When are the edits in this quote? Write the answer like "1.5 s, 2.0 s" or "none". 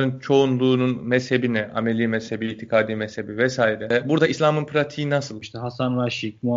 5.4 s